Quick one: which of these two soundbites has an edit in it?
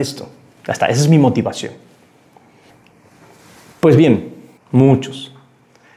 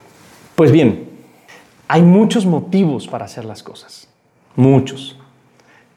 first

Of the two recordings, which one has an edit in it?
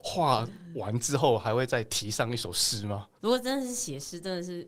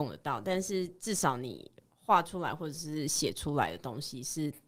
first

